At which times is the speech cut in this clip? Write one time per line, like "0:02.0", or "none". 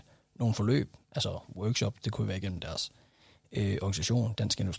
none